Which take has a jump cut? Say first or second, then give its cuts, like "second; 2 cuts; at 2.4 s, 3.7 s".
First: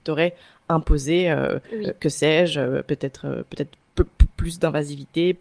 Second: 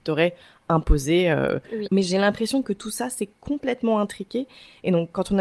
second; 1 cut; at 1.8 s